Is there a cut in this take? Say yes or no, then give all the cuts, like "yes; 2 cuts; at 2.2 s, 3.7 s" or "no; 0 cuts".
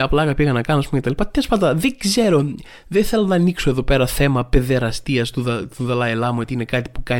no; 0 cuts